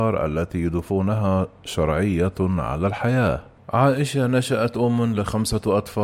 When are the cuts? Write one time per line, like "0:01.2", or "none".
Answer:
0:03.6